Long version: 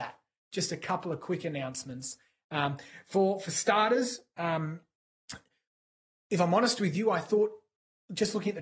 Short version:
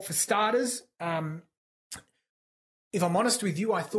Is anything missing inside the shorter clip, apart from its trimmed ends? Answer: no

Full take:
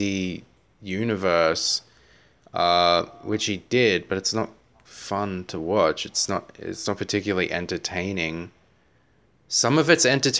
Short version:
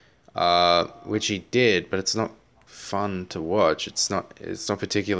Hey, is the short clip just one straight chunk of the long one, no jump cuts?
yes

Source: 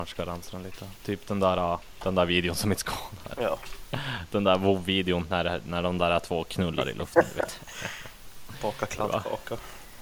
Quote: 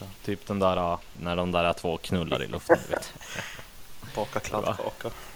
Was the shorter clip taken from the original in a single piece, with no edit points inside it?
no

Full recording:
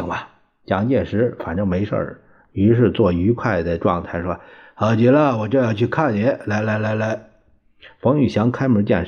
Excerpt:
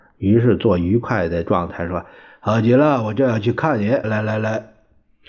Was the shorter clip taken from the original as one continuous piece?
no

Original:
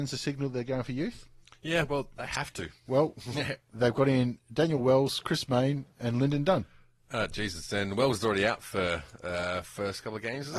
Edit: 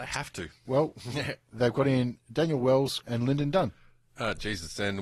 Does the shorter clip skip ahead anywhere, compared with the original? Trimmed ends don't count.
yes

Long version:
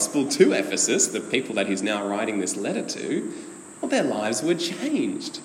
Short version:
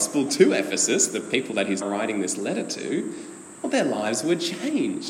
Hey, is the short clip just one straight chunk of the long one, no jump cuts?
no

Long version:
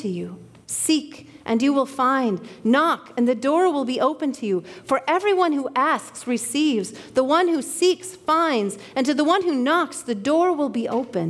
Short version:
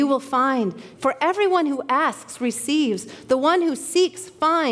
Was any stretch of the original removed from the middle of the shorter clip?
yes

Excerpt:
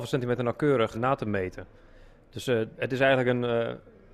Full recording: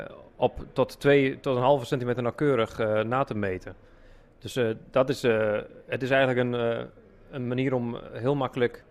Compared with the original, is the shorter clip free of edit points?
no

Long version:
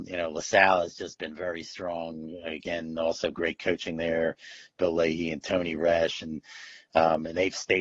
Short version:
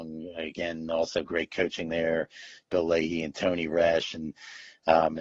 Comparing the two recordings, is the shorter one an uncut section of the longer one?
yes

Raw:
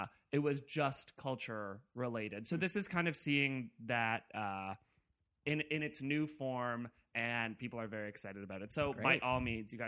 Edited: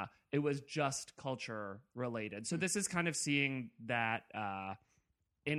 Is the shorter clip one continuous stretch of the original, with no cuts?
yes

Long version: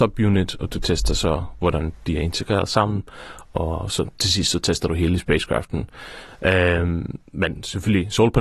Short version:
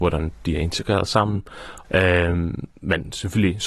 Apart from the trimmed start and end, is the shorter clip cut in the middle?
yes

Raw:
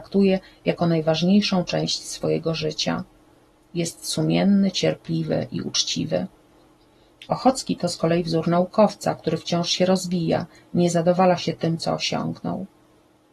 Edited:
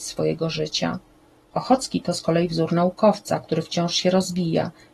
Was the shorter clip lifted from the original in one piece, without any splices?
no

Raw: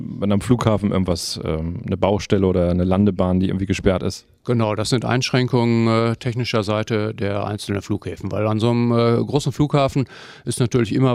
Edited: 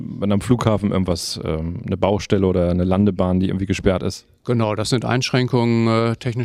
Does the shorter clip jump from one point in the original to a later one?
no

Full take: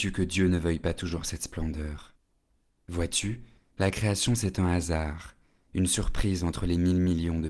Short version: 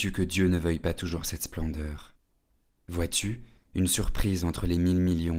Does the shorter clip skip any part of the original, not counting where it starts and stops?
yes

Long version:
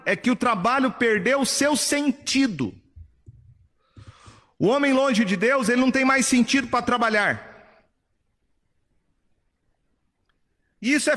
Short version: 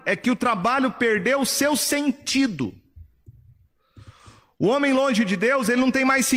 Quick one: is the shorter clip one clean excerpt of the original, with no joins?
yes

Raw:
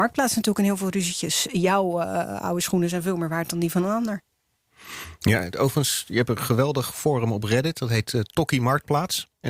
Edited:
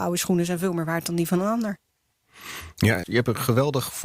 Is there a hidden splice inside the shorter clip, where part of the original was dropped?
yes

